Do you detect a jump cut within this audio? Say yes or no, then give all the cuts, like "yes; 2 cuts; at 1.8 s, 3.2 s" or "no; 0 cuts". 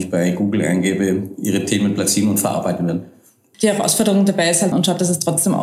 yes; 2 cuts; at 3.5 s, 4.7 s